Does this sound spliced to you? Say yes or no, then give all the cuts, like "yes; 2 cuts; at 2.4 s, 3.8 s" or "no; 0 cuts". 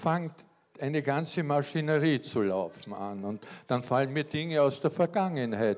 no; 0 cuts